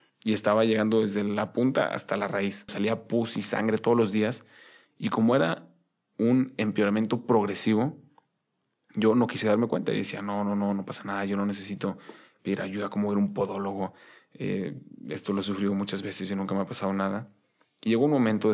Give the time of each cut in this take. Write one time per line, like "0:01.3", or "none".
0:02.7